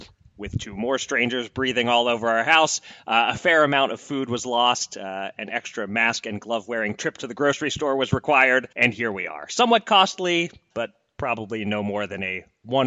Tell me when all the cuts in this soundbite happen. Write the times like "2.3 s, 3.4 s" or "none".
8.7 s, 10.7 s

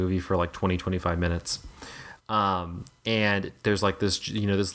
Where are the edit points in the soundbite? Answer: none

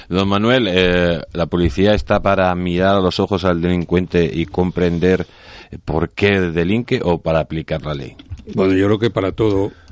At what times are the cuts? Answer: none

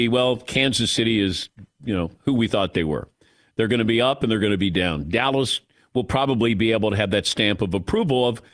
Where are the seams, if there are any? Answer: none

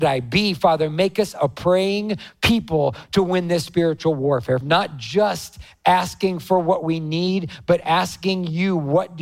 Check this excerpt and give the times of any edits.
4.6 s

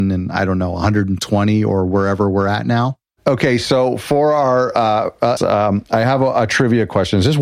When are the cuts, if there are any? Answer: 5.4 s

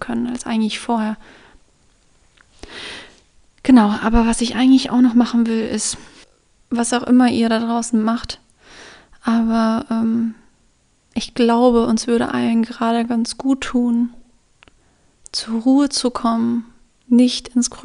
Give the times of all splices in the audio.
none

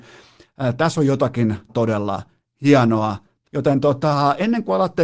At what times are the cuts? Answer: 1.7 s, 3.4 s

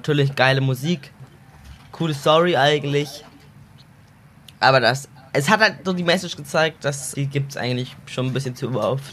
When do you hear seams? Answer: 7.1 s

